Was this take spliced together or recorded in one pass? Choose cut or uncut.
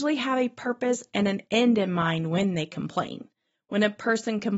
uncut